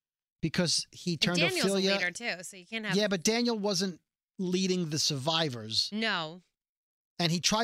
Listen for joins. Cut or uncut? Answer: uncut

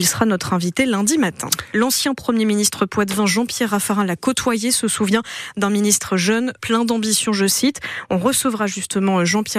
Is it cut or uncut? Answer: cut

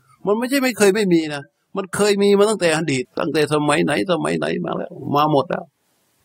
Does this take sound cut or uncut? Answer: cut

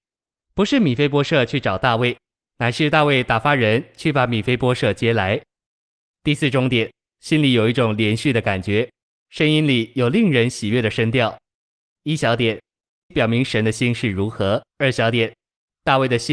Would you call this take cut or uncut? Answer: cut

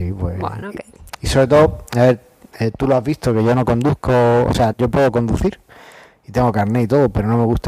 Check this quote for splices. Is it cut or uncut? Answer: cut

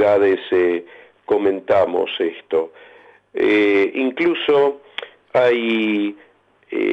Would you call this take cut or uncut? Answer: uncut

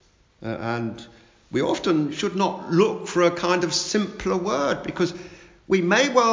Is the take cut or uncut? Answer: uncut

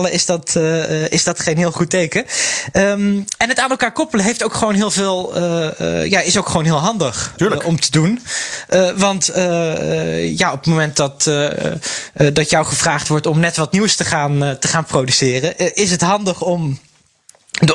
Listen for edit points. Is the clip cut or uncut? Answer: uncut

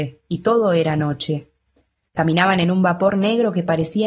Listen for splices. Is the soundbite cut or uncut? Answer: cut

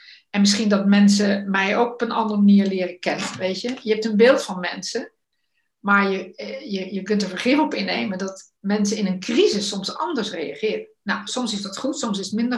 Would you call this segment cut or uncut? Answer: uncut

